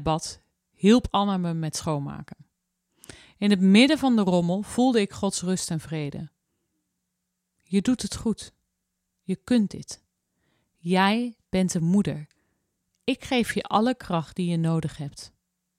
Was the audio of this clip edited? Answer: no; 0 cuts

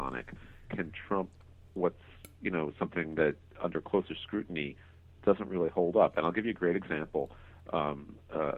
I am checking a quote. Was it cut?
no; 0 cuts

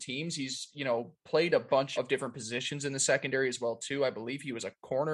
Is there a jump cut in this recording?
yes; 1 cut; at 2.0 s

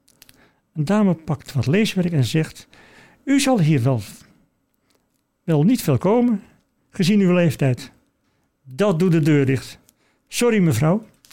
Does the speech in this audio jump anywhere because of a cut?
no; 0 cuts

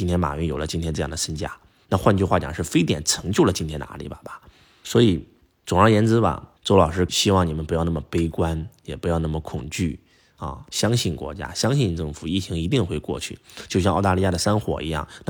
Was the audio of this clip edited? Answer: no; 0 cuts

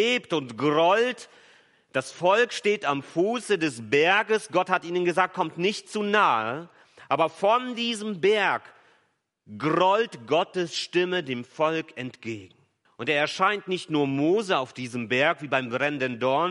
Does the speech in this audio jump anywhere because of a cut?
yes; 1 cut; at 12.9 s

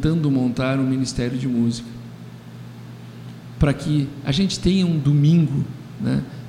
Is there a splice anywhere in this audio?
no; 0 cuts

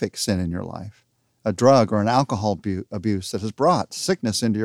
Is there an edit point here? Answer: no; 0 cuts

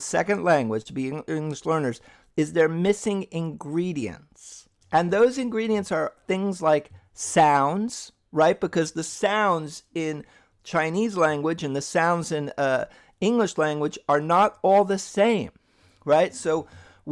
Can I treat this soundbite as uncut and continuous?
yes; 0 cuts

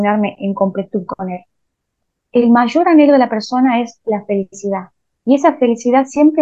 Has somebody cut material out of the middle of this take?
no; 0 cuts

